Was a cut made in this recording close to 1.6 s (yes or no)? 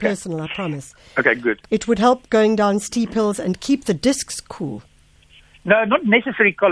yes